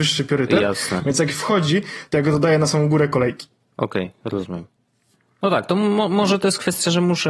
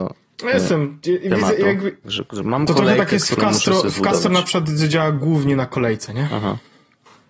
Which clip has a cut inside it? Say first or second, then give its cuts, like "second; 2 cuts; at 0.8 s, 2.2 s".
second; 1 cut; at 2.0 s